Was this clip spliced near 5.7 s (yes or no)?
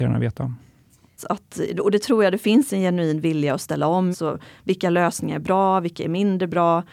no